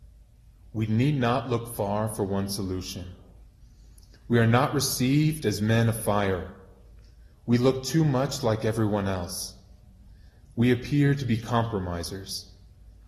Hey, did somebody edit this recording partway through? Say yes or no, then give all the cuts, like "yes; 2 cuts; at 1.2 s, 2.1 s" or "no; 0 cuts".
no; 0 cuts